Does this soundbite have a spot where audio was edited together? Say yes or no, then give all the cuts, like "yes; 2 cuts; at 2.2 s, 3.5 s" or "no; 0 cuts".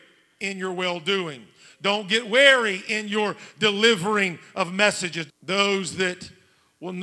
yes; 1 cut; at 5.3 s